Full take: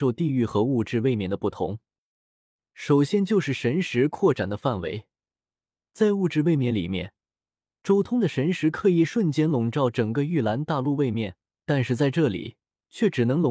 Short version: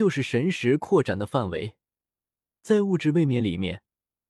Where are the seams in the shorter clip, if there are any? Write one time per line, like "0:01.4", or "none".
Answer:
none